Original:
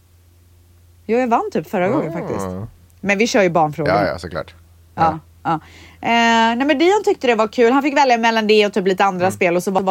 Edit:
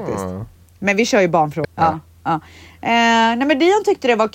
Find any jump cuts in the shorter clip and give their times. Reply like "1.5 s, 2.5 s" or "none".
1.6 s